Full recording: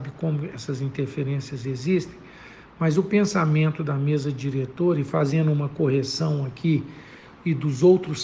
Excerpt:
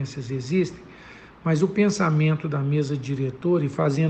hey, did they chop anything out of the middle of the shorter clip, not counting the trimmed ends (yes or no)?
no